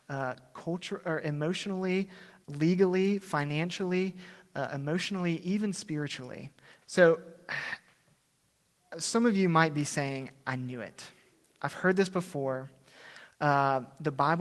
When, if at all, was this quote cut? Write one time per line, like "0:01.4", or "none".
0:02.4
0:06.8